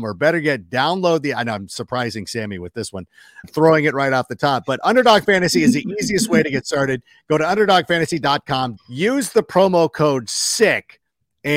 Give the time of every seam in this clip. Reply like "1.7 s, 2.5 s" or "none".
3.4 s, 8.8 s